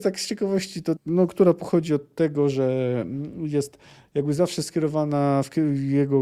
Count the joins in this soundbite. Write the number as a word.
one